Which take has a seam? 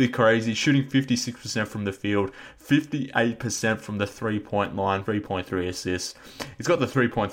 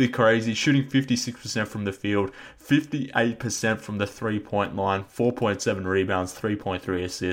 first; 1 cut; at 5.0 s

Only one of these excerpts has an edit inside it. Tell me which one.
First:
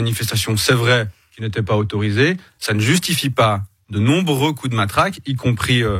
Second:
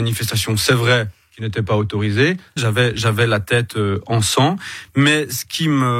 second; 1 cut; at 2.6 s

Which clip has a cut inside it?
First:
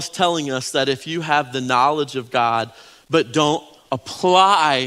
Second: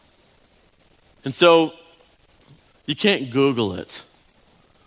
second; 1 cut; at 2.7 s

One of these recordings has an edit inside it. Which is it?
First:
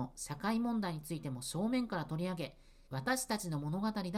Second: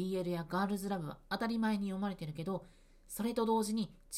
first; 1 cut; at 2.9 s

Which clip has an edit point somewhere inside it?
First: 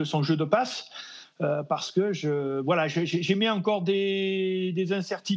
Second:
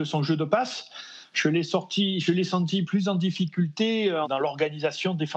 second; 3 cuts; at 1.3 s, 2.8 s, 4.2 s

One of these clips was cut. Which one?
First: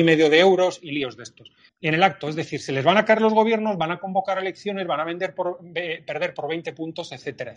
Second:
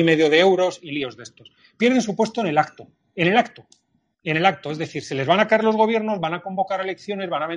first; 1 cut; at 1.7 s

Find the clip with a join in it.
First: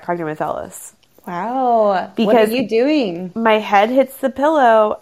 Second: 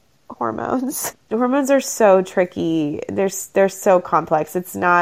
second; 1 cut; at 1.1 s

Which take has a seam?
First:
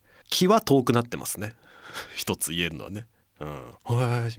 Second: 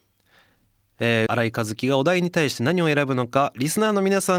second; 1 cut; at 1.3 s

